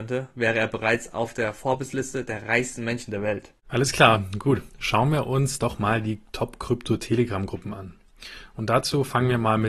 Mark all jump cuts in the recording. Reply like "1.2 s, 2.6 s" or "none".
3.6 s